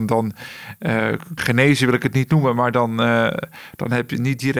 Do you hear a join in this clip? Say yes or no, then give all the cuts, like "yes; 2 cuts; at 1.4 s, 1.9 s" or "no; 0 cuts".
yes; 1 cut; at 1.4 s